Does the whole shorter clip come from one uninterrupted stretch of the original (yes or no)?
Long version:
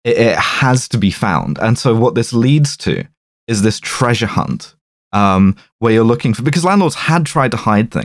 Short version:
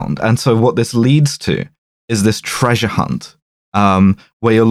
yes